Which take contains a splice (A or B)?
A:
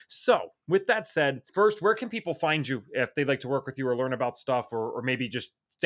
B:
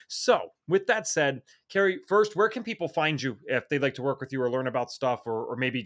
A